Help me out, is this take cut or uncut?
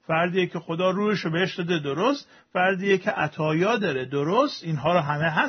uncut